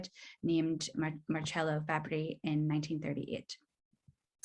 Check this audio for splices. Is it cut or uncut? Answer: cut